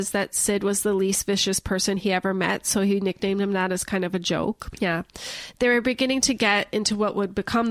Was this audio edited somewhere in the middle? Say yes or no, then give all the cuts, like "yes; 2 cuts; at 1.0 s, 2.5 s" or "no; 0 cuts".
yes; 1 cut; at 4.7 s